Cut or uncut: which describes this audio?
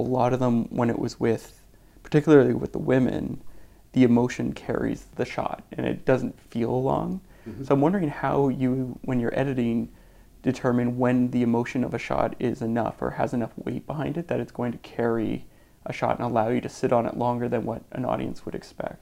uncut